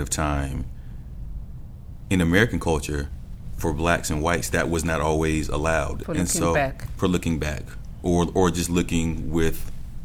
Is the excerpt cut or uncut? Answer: cut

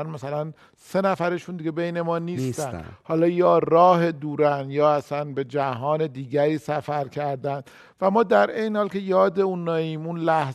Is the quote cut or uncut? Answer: uncut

